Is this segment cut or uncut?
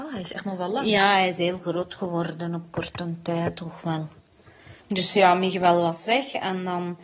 cut